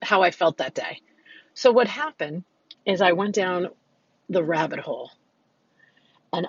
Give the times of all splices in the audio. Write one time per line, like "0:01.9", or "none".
0:02.7